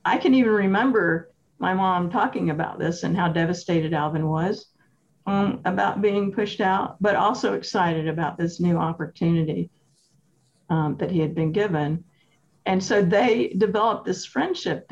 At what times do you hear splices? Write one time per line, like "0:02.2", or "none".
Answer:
none